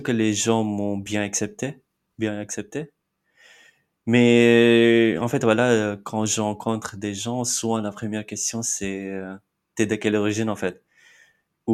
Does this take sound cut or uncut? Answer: uncut